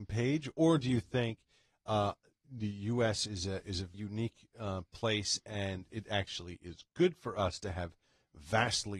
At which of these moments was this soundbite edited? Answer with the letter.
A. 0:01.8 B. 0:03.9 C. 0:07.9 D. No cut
B